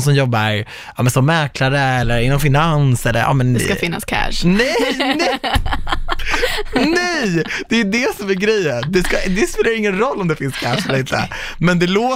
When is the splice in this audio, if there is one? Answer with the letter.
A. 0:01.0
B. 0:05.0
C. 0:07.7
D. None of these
D